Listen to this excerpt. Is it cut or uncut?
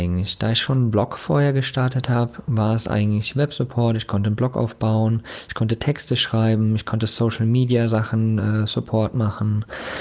uncut